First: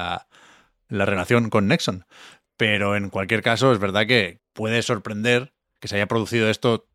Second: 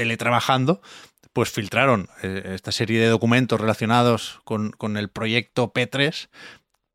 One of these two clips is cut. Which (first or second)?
first